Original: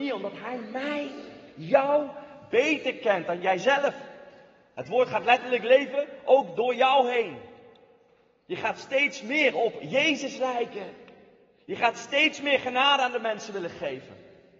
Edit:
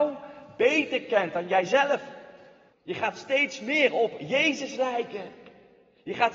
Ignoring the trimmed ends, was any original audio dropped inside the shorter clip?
yes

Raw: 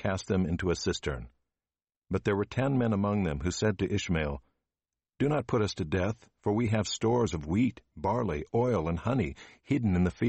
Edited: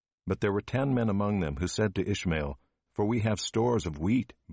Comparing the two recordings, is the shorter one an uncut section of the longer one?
no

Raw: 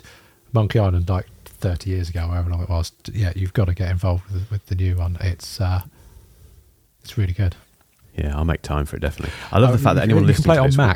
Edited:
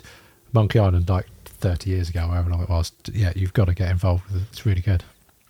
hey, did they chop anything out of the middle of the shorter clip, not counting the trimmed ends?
yes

